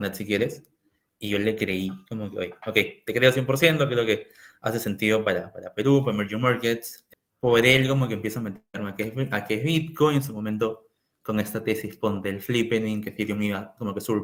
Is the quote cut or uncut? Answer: uncut